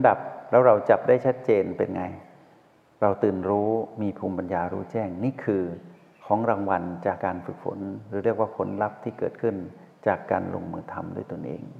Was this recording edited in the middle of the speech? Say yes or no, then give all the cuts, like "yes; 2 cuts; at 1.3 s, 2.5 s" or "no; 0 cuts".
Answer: yes; 1 cut; at 7.2 s